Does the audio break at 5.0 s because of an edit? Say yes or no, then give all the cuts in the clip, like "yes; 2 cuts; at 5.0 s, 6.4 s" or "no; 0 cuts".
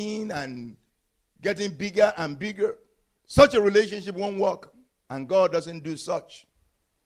no; 0 cuts